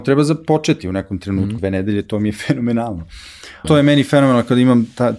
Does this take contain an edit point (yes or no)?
yes